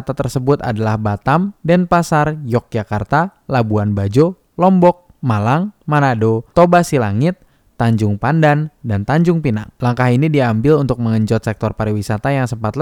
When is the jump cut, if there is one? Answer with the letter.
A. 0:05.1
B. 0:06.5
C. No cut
B